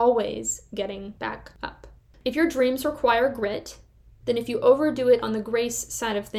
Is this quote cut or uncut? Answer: cut